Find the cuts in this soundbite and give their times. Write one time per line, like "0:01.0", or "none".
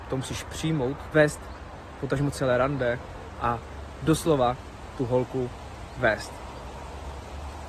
0:01.1